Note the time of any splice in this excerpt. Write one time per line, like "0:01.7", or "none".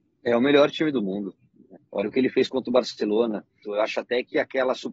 0:01.8
0:03.6